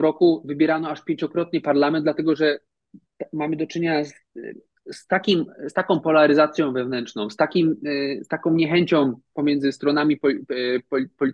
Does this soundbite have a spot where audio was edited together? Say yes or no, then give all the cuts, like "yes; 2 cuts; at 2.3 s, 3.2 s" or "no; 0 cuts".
no; 0 cuts